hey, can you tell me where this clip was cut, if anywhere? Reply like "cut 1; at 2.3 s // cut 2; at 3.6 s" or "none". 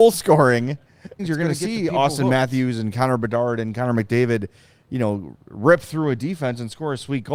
cut 1; at 1.2 s